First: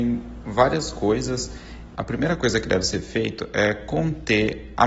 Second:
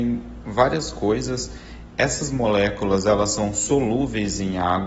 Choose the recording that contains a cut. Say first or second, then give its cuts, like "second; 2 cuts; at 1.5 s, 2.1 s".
first; 1 cut; at 2.0 s